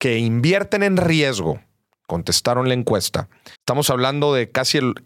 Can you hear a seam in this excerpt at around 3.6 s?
yes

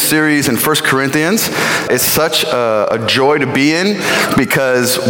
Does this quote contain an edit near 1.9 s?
yes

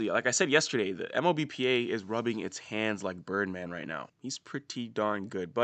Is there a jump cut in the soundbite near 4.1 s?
yes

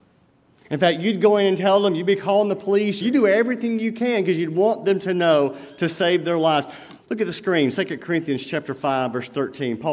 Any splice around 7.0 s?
yes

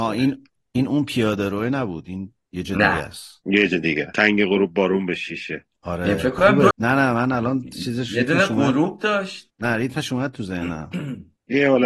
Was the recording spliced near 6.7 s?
yes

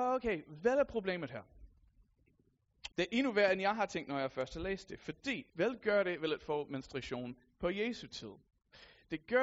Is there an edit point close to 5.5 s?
yes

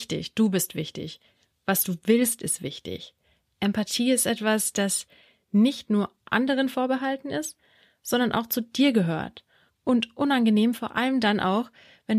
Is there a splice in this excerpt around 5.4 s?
no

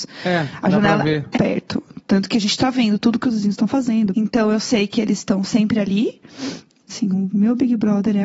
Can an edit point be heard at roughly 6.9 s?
yes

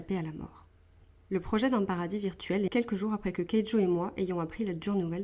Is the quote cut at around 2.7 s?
yes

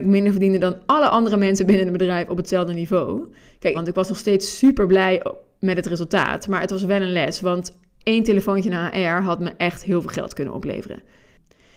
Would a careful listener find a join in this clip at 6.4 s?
no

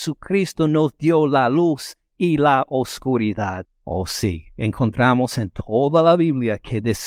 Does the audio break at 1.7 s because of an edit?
no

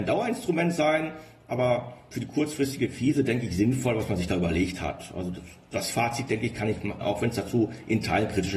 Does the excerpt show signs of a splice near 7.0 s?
yes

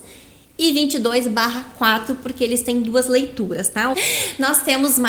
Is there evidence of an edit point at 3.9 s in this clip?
yes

